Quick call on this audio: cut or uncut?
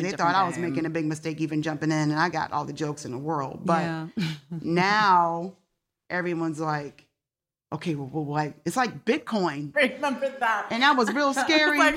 cut